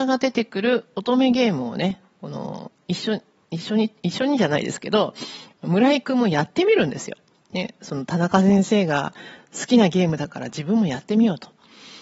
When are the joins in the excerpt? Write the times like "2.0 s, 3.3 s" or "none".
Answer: none